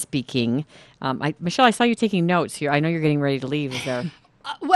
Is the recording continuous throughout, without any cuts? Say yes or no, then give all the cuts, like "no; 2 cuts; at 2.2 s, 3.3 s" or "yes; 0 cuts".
yes; 0 cuts